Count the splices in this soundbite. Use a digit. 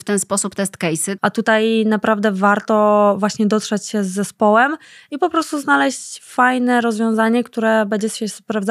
1